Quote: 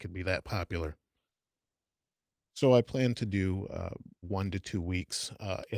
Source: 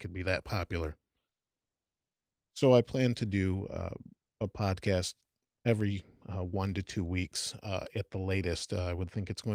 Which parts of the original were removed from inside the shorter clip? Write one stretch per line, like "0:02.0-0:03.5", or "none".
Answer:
0:04.2-0:06.5